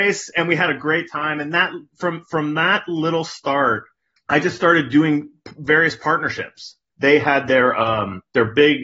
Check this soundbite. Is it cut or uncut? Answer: cut